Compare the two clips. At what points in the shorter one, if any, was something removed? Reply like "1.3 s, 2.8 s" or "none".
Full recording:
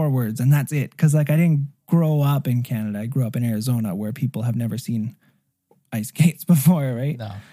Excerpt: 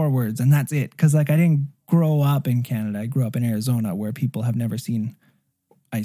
none